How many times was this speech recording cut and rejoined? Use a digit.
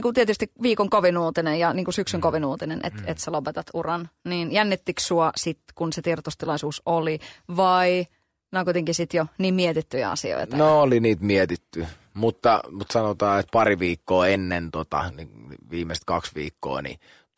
0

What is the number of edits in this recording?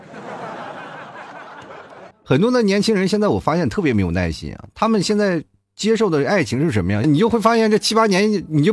2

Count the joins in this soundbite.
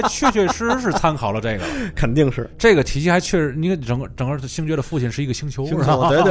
0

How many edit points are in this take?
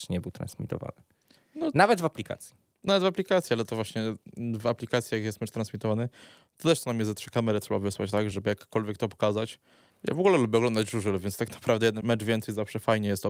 3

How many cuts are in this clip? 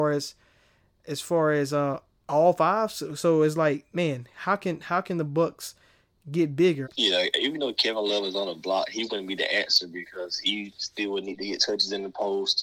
1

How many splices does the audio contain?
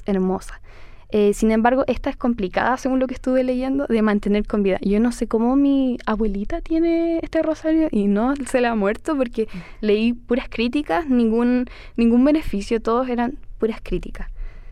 0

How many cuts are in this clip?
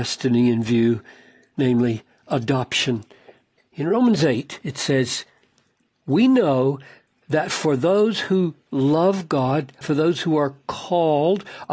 2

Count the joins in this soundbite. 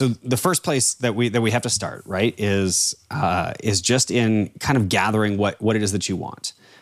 0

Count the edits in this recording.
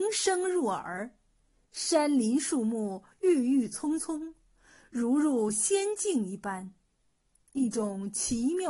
0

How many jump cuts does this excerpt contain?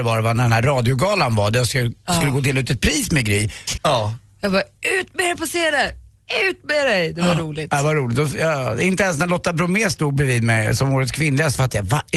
1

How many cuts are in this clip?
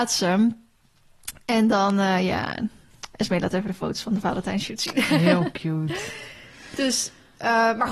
0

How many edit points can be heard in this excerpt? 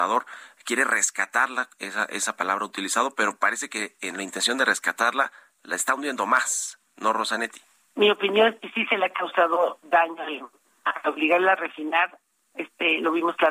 1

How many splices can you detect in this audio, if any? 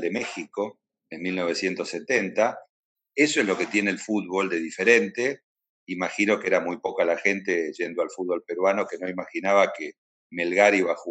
2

